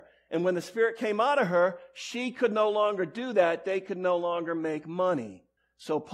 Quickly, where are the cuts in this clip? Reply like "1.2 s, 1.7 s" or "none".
none

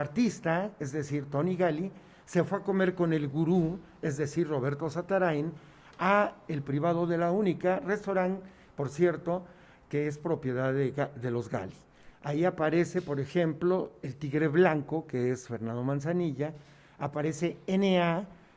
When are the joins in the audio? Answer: 12.1 s

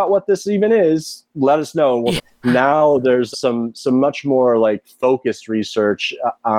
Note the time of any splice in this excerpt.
2.2 s, 3.3 s

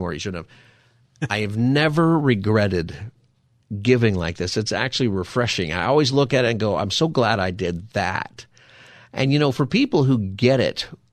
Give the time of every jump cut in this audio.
none

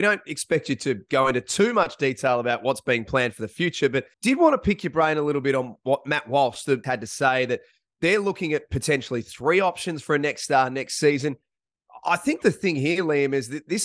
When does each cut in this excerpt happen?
4.1 s, 6.8 s

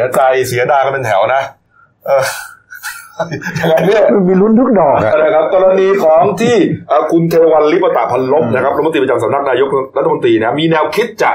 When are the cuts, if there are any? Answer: 5.1 s

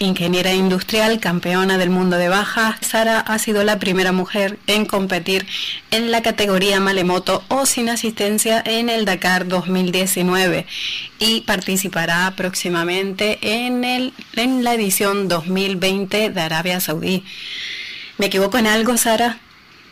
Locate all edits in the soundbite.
2.8 s

